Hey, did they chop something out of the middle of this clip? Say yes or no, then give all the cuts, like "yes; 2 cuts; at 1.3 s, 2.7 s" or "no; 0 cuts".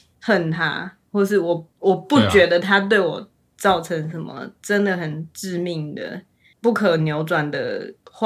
no; 0 cuts